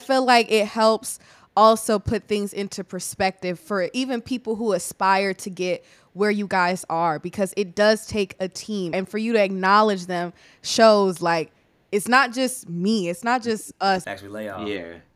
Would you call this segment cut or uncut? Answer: cut